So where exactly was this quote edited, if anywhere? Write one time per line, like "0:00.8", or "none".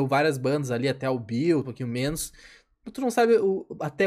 0:01.6